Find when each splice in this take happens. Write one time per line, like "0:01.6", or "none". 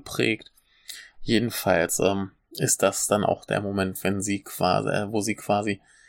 0:01.1